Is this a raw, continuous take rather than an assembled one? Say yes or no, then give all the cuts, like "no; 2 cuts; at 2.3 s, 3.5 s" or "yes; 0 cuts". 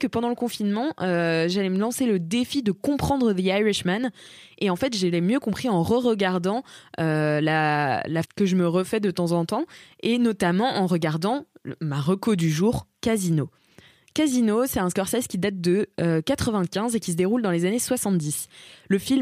no; 1 cut; at 8.2 s